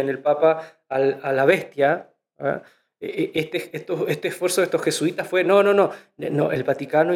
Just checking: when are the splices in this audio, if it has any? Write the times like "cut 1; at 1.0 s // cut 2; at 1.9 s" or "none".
none